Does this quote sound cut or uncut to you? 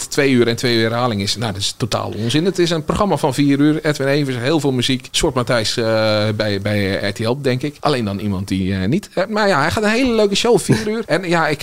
uncut